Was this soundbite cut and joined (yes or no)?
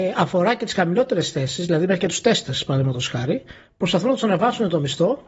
no